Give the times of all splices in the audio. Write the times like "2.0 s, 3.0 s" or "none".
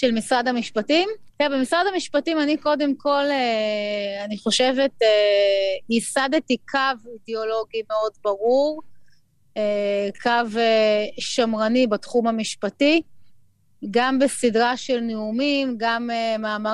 1.3 s